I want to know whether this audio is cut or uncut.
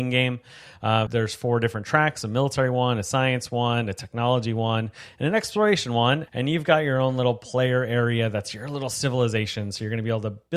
cut